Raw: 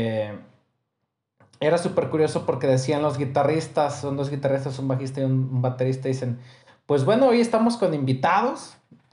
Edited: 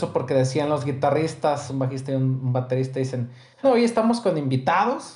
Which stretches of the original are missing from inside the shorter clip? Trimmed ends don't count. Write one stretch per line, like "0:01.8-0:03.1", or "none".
0:04.0-0:04.8
0:06.7-0:07.2